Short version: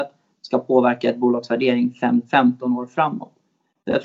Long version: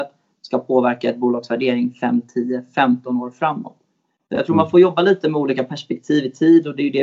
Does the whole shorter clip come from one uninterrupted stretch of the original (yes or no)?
no